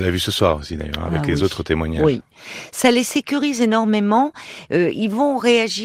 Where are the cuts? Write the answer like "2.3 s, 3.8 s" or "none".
none